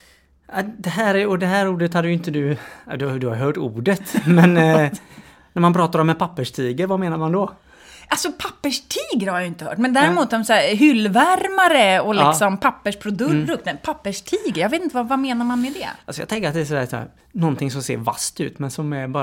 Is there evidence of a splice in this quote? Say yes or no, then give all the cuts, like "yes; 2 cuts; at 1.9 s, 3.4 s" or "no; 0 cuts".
no; 0 cuts